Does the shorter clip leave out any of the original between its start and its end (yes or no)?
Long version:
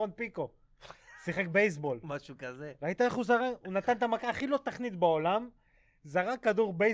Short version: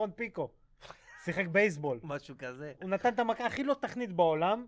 yes